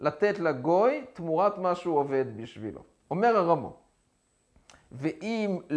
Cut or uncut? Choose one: uncut